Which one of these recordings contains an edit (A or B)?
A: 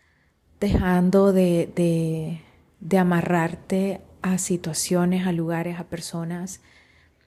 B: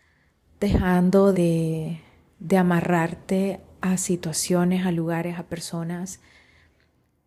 B